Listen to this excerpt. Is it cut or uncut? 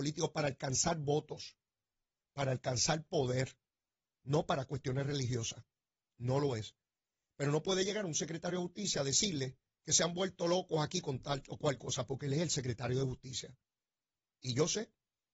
uncut